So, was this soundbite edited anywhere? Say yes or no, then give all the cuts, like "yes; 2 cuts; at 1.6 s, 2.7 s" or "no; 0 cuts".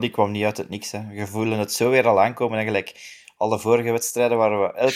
no; 0 cuts